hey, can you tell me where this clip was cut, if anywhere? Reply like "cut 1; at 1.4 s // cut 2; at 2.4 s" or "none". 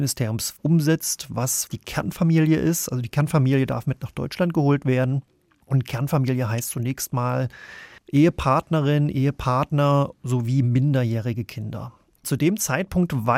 cut 1; at 12.2 s